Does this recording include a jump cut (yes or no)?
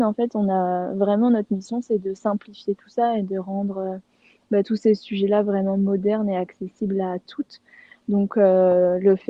no